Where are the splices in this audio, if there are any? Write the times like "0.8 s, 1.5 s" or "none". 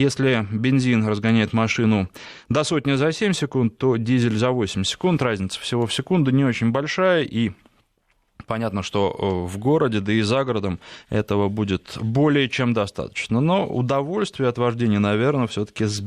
none